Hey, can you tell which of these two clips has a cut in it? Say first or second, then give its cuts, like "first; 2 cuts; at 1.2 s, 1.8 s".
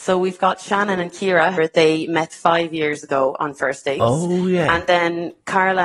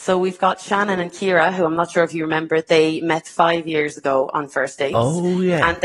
first; 1 cut; at 1.5 s